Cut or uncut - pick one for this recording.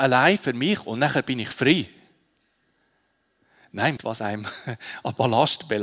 cut